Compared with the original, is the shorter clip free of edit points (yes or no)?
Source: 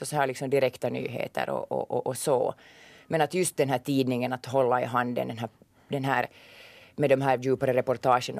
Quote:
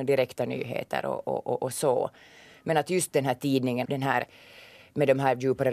no